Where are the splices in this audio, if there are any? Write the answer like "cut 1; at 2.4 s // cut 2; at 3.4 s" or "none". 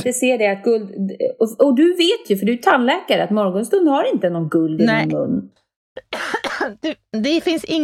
none